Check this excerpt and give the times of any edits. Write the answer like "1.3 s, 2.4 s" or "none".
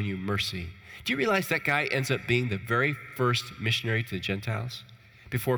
none